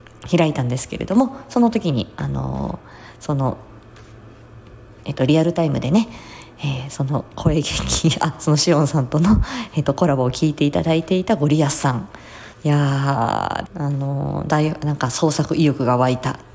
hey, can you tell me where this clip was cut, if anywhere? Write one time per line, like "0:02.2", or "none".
0:12.5
0:13.7